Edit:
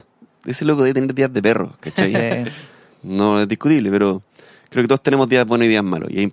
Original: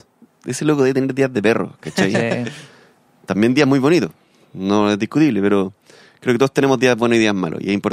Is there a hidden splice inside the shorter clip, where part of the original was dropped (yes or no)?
yes